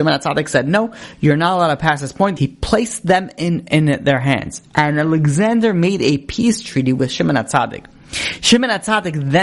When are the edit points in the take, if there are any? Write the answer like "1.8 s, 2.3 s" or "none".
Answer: 2.4 s